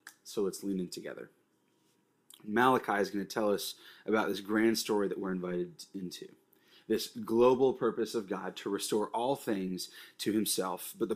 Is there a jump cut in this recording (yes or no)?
yes